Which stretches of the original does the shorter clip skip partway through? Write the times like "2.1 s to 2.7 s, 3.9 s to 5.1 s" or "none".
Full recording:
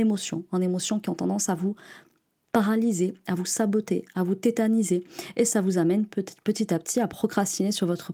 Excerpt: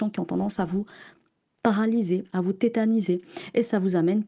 3.2 s to 4.1 s